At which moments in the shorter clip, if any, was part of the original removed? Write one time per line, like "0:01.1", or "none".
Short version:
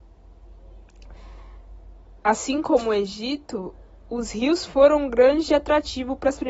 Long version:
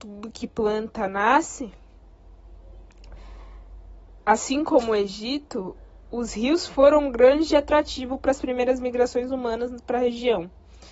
none